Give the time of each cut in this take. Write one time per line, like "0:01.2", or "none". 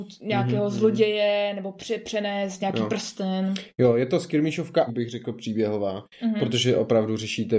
0:04.9